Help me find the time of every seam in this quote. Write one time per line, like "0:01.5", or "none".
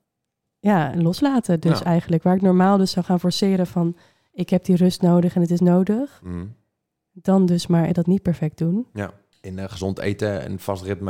0:07.9
0:09.3